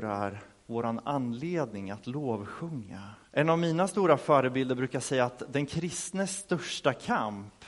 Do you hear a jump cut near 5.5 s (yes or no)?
no